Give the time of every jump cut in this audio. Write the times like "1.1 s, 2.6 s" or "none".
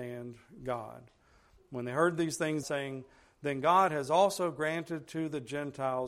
2.6 s